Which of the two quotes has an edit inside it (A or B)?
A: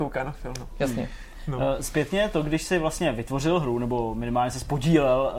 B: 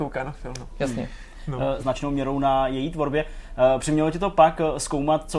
B